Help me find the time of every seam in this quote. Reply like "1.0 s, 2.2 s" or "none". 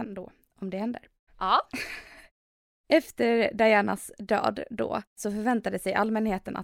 1.3 s, 5.1 s